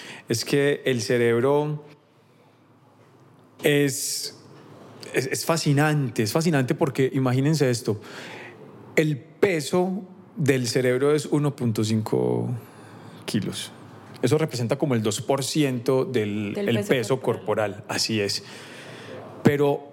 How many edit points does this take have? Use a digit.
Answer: 1